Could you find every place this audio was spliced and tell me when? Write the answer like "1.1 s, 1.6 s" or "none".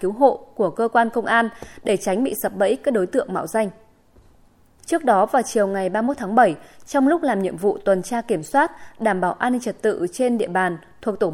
4.8 s